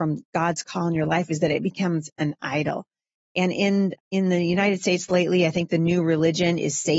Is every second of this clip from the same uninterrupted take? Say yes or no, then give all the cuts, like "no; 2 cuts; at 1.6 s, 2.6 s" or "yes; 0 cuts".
no; 1 cut; at 3.9 s